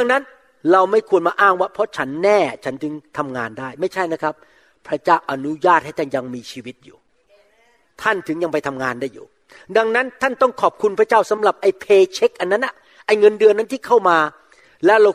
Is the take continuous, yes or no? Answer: yes